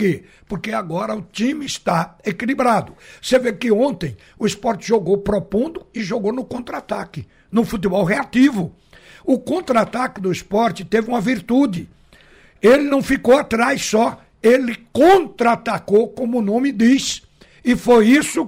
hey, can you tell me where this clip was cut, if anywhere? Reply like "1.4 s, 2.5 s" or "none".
none